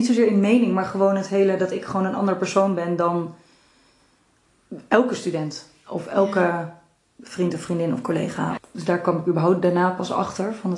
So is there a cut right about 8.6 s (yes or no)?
yes